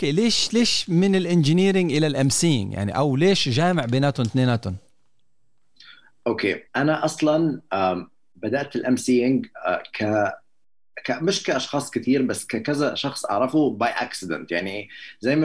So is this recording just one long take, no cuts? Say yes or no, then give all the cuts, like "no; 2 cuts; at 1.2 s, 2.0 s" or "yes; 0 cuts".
no; 1 cut; at 6.7 s